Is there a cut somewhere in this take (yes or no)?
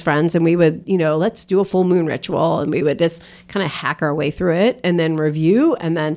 no